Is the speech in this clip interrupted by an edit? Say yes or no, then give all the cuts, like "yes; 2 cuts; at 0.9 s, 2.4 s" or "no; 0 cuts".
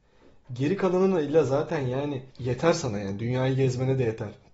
yes; 1 cut; at 2.3 s